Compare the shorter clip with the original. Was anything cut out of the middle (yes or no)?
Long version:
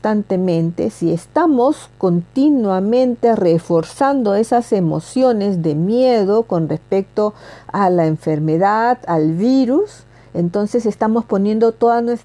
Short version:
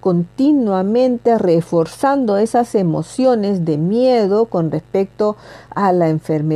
no